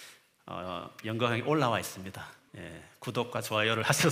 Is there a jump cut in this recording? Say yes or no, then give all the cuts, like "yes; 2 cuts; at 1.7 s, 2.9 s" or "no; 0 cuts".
yes; 1 cut; at 2.5 s